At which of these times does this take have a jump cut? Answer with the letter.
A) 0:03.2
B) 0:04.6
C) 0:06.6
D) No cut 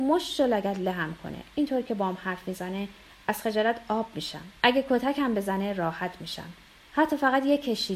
B